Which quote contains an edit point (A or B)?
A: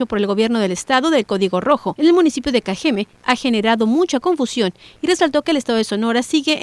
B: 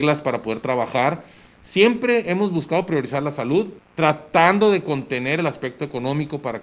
B